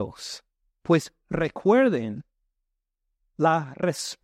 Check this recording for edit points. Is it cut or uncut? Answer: uncut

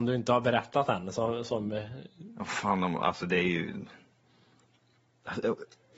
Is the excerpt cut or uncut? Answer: uncut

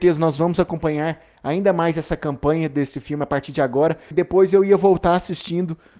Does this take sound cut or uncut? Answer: cut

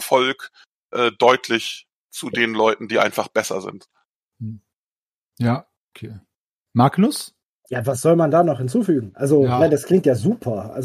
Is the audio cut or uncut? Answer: uncut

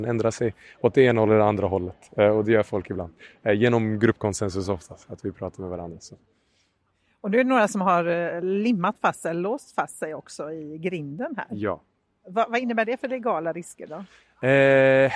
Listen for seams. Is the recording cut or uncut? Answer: uncut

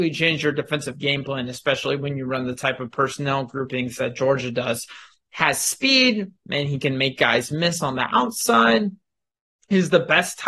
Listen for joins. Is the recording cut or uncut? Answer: uncut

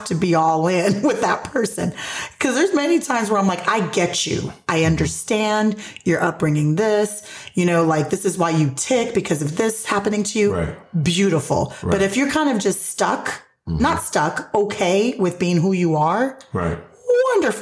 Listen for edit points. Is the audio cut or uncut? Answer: uncut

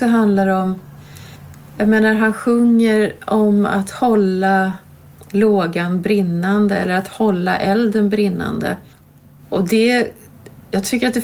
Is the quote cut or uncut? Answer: uncut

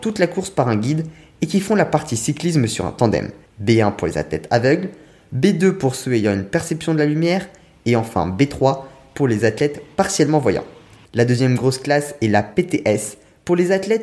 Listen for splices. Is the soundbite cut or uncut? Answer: cut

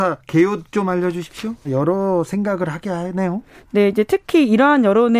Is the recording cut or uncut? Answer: cut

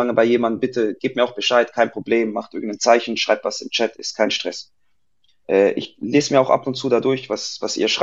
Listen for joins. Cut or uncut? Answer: uncut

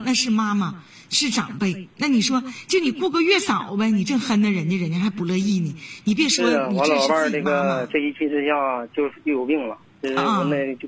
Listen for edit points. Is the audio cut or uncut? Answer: uncut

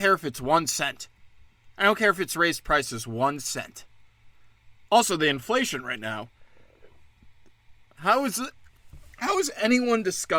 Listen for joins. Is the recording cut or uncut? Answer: cut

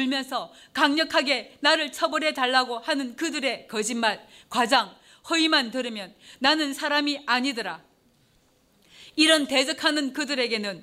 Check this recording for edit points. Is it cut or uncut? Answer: uncut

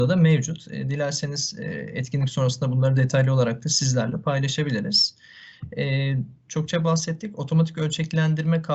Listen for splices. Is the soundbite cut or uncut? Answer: cut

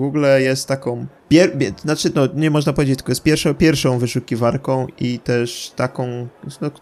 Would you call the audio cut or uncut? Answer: cut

